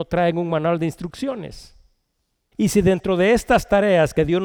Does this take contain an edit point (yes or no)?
yes